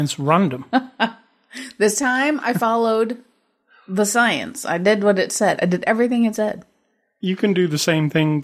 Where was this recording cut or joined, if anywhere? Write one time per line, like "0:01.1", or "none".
none